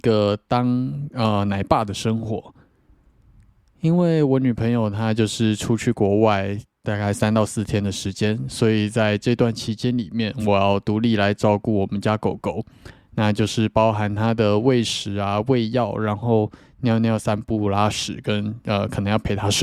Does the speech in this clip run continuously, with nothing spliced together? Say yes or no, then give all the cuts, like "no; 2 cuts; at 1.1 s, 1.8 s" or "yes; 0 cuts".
yes; 0 cuts